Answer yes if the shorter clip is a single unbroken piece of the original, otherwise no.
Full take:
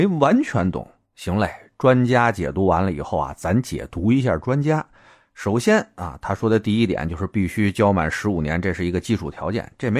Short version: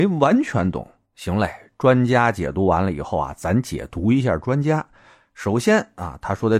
yes